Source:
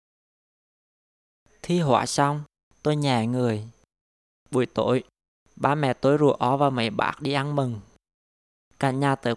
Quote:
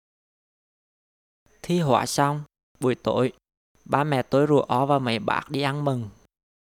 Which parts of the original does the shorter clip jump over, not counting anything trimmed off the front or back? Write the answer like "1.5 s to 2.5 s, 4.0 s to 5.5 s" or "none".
2.7 s to 4.4 s

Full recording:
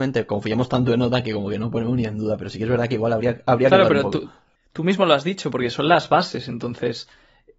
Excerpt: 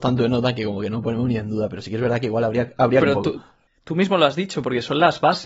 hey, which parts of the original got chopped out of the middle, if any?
3.7 s to 3.9 s

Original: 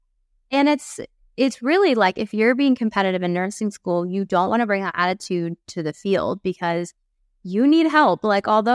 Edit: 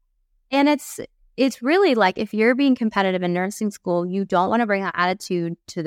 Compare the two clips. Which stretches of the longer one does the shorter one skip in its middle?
none

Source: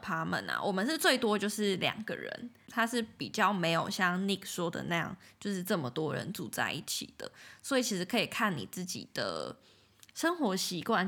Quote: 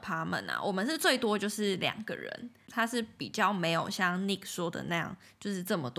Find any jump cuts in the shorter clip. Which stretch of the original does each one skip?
none

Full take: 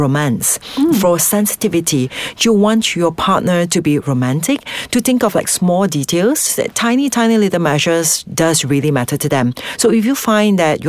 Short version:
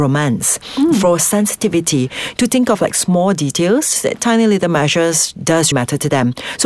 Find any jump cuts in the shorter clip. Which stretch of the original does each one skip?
2.3 s to 4.9 s, 6.7 s to 7.1 s, 8.6 s to 8.9 s

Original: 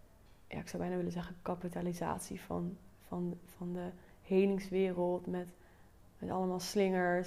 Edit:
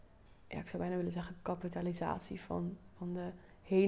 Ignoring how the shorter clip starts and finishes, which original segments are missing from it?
2.9 s to 3.5 s

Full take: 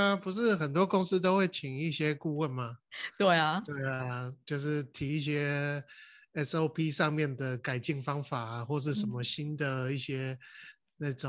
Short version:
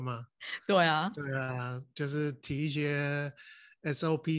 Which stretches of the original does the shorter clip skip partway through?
none

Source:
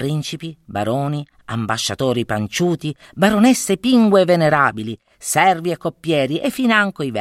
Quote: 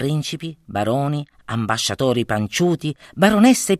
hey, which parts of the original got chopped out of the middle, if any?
none

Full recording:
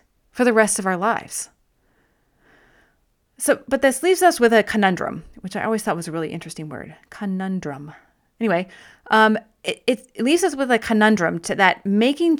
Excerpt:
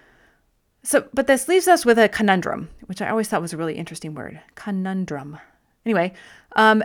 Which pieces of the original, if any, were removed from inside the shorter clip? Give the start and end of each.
none

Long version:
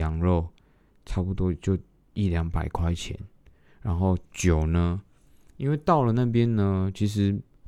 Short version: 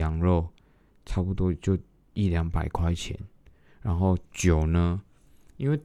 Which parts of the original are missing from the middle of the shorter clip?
none

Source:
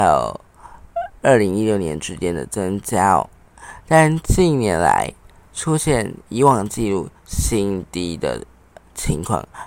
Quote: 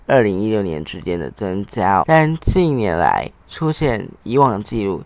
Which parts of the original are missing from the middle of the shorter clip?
3.2 s to 3.8 s, 5.2 s to 5.4 s

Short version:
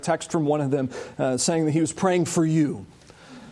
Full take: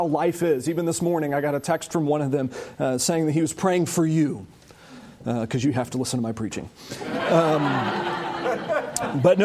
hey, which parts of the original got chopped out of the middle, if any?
none

